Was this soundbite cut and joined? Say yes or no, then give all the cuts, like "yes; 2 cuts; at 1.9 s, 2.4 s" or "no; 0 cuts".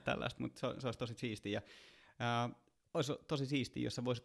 no; 0 cuts